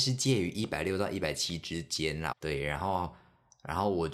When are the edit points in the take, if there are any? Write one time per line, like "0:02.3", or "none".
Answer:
0:02.3